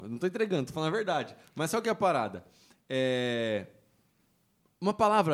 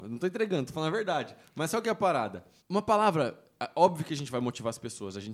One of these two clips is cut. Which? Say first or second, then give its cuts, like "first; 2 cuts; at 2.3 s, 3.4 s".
second; 1 cut; at 2.6 s